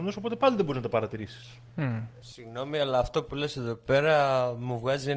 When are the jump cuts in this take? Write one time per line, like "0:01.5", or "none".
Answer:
none